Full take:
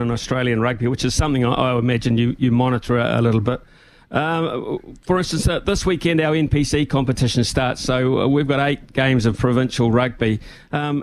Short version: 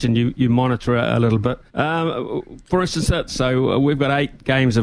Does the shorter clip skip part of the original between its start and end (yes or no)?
yes